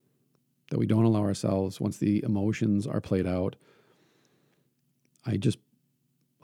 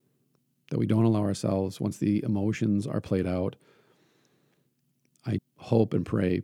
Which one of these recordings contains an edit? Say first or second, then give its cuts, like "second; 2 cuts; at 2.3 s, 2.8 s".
second; 1 cut; at 5.4 s